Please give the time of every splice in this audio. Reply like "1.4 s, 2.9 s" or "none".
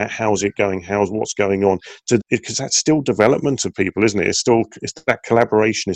2.2 s